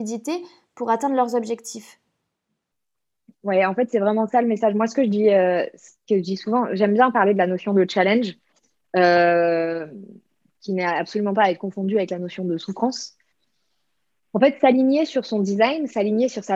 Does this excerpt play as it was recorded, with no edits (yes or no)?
yes